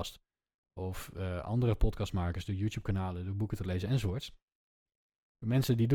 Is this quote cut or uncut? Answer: uncut